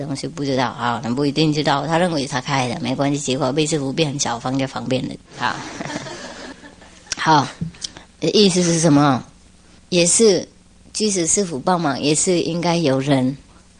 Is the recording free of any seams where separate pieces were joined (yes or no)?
yes